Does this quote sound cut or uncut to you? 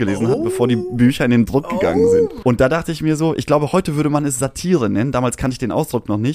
cut